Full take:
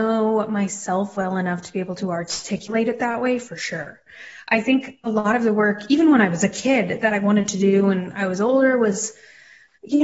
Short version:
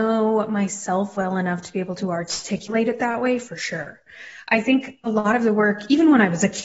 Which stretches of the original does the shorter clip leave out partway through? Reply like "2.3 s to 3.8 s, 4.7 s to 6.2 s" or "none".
none